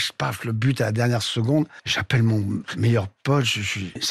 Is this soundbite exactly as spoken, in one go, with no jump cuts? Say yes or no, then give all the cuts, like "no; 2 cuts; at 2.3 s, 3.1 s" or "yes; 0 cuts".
yes; 0 cuts